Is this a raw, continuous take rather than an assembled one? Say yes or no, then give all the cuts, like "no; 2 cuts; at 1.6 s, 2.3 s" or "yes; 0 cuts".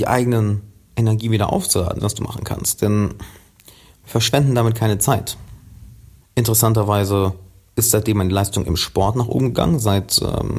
no; 2 cuts; at 2.0 s, 6.2 s